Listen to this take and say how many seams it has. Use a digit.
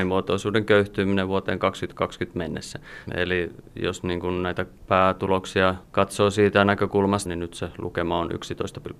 2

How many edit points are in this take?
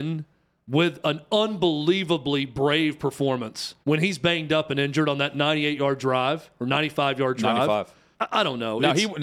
2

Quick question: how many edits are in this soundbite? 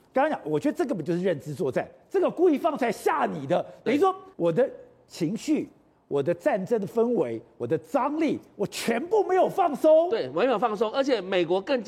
1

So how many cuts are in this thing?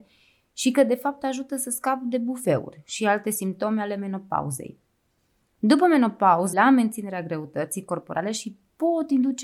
1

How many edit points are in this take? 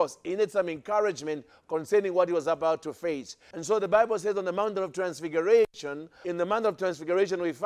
2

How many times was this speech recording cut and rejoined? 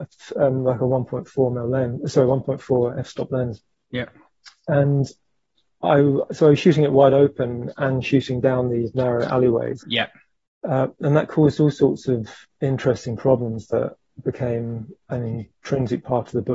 2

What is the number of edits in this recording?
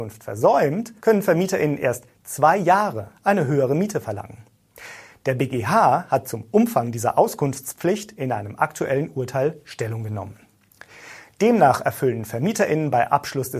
2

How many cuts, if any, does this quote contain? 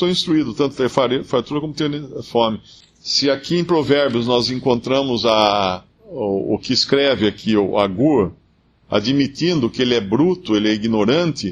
2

